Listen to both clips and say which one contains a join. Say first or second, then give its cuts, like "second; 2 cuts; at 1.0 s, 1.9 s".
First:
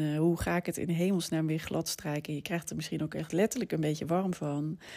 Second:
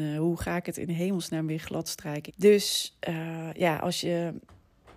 second; 1 cut; at 2.3 s